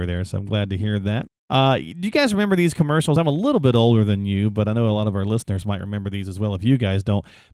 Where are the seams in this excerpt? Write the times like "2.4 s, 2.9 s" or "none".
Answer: none